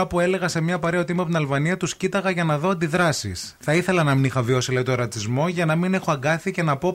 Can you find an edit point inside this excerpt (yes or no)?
no